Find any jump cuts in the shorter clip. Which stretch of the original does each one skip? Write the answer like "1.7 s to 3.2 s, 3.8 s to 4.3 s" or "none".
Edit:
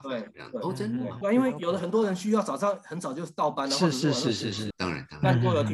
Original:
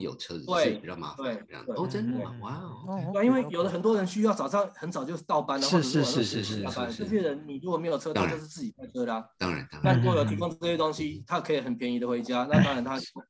2.4 s to 3.1 s, 6.6 s to 9.3 s